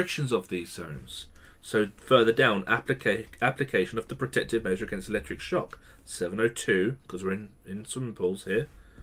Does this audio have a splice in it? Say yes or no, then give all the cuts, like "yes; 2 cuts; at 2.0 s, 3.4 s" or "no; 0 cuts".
no; 0 cuts